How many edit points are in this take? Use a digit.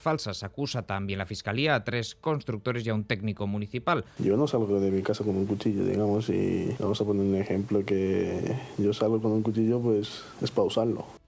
1